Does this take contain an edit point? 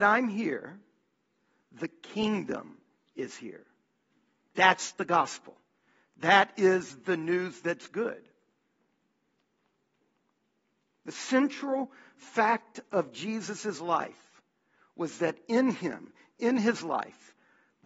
no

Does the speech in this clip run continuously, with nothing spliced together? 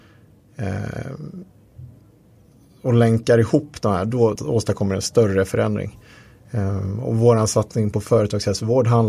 no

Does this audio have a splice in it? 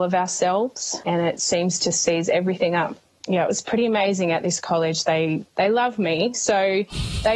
no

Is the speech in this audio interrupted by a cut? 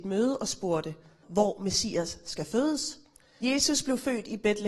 yes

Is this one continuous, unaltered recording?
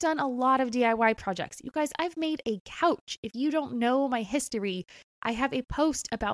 yes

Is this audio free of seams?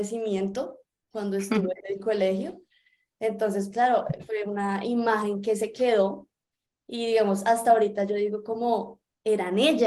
no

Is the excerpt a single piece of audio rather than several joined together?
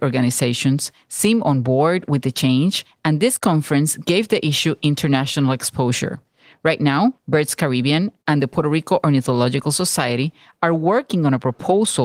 no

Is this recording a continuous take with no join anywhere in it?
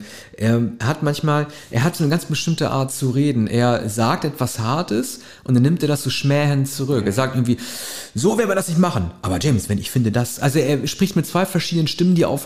yes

